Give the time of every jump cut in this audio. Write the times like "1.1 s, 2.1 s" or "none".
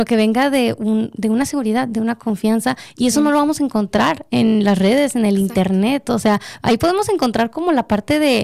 none